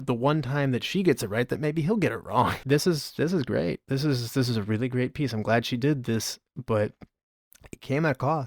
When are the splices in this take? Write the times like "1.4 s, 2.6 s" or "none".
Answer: none